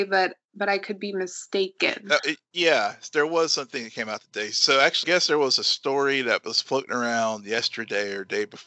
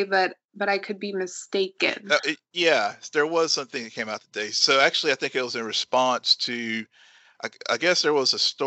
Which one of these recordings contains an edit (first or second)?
first